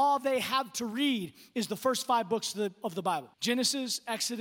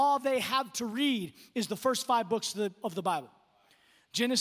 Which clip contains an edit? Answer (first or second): first